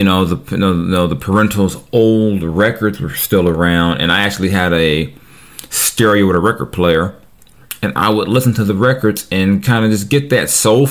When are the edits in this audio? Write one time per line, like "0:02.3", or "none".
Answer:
none